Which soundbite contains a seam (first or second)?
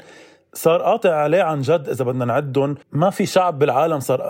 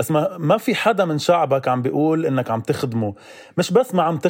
first